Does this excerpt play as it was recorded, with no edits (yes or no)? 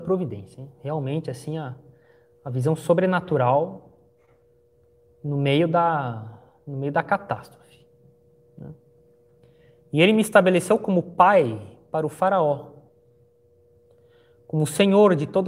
yes